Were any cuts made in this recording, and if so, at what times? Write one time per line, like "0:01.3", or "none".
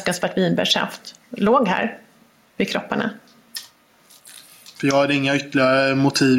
0:04.7